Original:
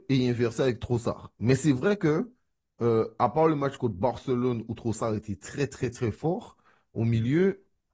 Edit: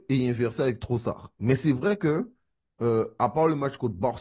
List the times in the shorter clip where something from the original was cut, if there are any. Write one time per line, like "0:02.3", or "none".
none